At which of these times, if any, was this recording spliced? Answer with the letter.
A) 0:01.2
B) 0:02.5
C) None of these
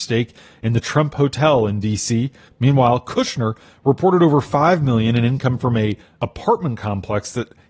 B